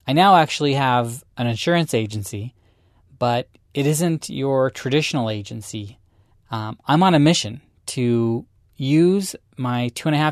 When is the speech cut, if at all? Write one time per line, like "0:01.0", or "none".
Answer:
0:06.3